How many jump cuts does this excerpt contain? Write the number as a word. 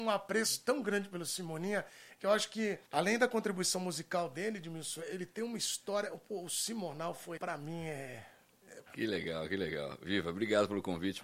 three